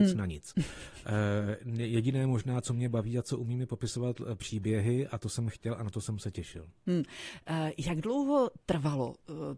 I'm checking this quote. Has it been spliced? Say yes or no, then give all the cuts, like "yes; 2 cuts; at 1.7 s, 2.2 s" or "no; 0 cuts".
no; 0 cuts